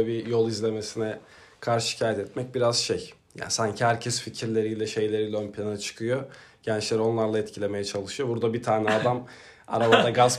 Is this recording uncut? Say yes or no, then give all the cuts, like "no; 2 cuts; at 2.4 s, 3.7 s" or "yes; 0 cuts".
yes; 0 cuts